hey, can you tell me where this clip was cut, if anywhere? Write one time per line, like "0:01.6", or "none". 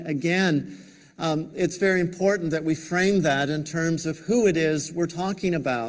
none